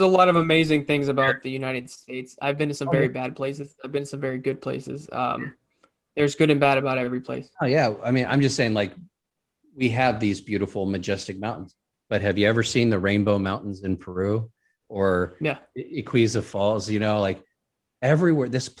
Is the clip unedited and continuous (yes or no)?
yes